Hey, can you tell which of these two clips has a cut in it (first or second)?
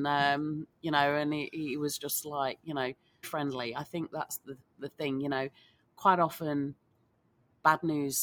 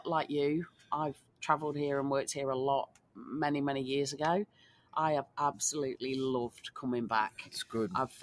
first